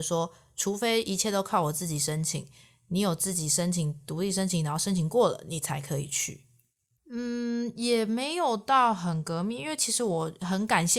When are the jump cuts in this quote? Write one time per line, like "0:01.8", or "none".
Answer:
0:07.0